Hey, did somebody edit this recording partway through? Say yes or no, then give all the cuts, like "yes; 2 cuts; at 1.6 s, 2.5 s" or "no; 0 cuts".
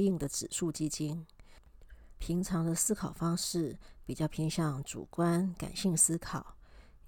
yes; 1 cut; at 2.2 s